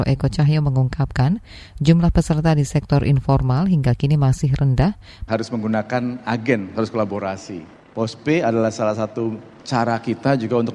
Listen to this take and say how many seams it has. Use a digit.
1